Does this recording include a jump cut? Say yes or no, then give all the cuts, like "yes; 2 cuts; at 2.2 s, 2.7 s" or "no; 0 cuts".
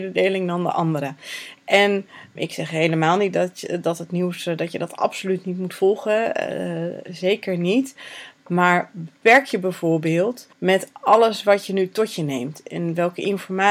yes; 2 cuts; at 2.4 s, 10.5 s